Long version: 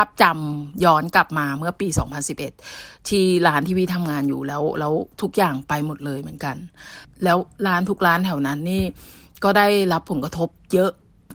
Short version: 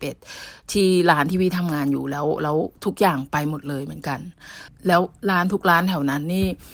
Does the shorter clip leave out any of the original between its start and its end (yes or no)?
no